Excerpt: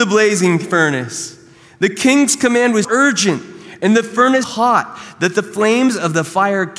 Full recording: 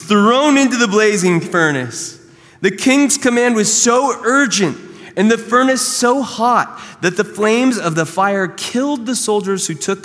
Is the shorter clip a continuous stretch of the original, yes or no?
no